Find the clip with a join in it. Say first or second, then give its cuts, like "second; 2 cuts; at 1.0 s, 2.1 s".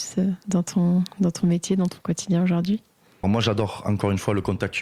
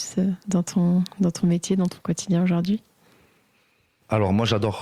first; 1 cut; at 3.2 s